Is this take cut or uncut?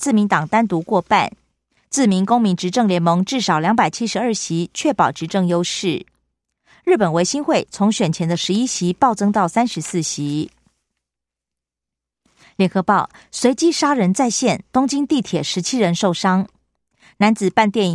uncut